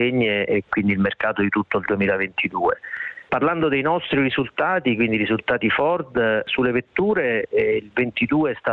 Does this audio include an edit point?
no; 0 cuts

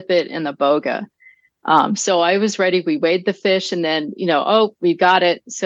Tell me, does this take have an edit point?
no; 0 cuts

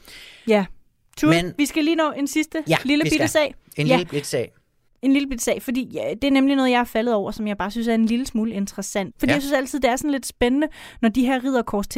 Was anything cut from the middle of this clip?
yes; 1 cut; at 9.1 s

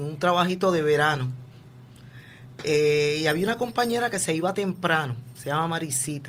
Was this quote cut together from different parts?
no; 0 cuts

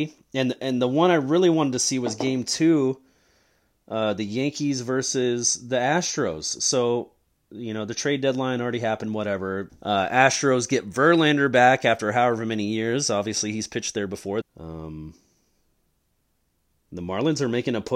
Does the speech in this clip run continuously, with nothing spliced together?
no; 2 cuts; at 9.7 s, 14.4 s

